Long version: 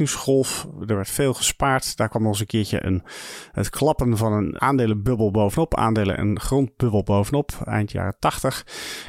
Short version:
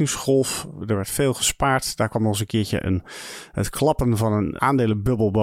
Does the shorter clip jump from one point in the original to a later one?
no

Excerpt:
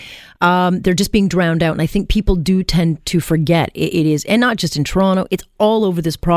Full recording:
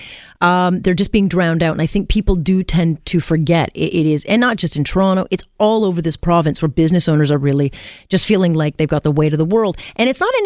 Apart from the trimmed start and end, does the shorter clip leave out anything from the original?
no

